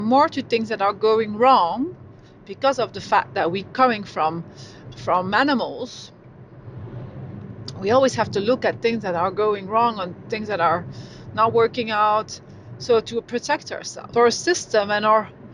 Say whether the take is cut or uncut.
cut